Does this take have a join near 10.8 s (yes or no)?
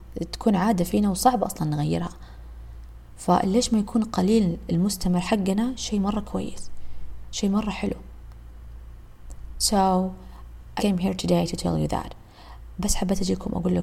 yes